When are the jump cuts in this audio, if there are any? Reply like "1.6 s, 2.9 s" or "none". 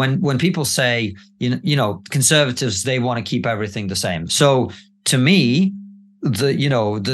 4.3 s